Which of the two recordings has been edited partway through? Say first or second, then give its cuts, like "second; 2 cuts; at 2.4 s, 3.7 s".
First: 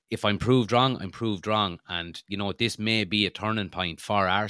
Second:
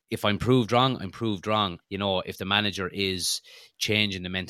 second; 1 cut; at 1.8 s